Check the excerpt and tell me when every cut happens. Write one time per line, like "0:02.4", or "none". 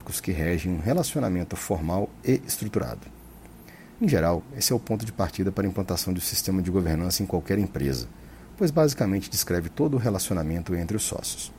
0:04.0